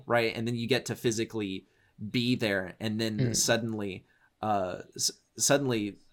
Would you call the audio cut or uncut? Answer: uncut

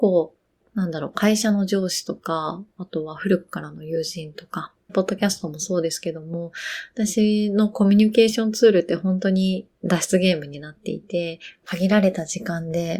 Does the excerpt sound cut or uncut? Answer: cut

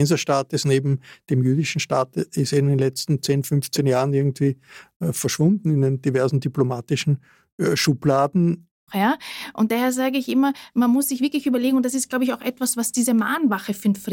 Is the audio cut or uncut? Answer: cut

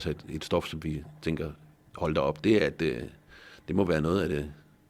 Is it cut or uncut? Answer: uncut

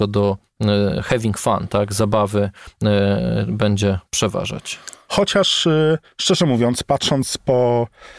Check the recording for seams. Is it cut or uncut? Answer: cut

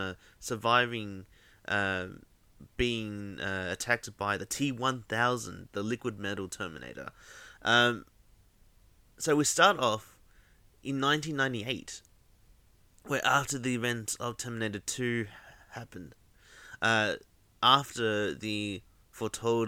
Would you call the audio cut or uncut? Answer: cut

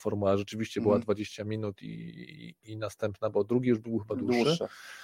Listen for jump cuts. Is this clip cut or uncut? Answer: uncut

